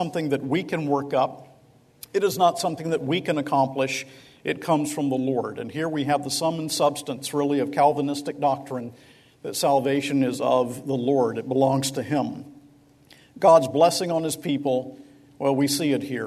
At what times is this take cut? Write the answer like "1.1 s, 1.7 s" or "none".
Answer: none

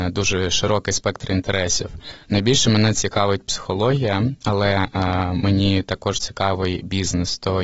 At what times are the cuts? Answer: none

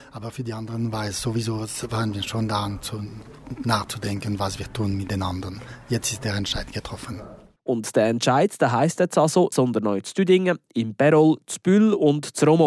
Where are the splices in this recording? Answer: 9.5 s

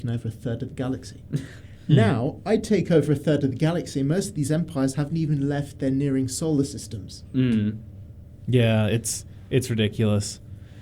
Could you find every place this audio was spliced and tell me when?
none

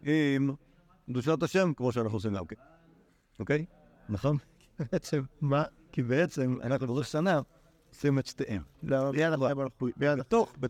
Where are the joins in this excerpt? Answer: none

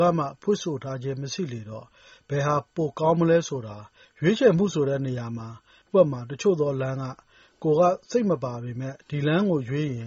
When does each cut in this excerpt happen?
4.0 s, 5.8 s

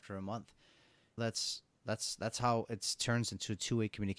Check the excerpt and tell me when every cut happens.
1.2 s

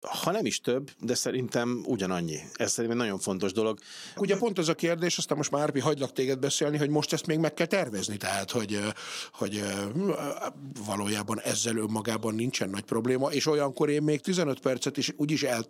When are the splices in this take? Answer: 4.2 s, 8.2 s

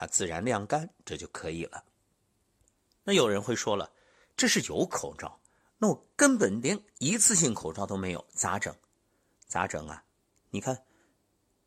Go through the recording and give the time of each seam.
10.4 s

